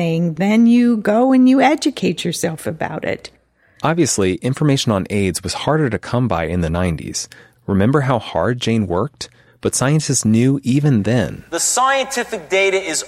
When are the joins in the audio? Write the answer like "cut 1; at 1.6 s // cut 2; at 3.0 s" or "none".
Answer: cut 1; at 7.5 s // cut 2; at 9.5 s